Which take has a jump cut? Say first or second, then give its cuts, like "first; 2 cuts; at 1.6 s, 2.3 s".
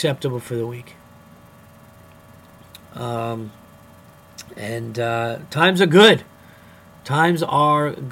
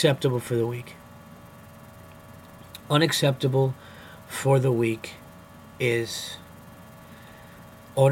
first; 1 cut; at 2.8 s